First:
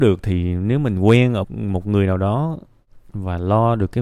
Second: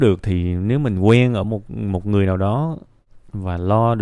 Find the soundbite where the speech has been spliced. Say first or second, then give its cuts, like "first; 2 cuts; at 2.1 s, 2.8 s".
first; 1 cut; at 1.4 s